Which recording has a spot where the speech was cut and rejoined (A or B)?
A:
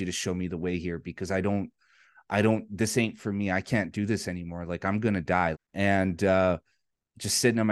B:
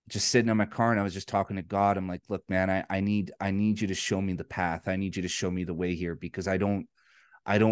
A